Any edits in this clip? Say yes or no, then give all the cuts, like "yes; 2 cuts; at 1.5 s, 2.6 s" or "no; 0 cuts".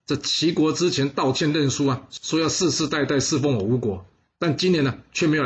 no; 0 cuts